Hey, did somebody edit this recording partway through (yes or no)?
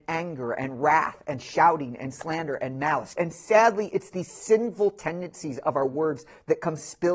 yes